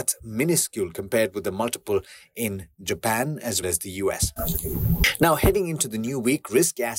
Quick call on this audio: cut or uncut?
cut